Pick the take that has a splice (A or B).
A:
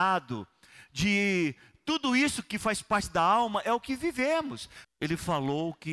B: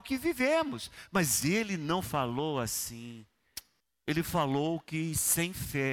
A